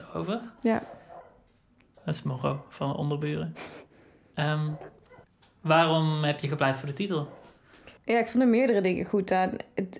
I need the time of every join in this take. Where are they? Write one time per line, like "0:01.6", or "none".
0:02.0
0:08.0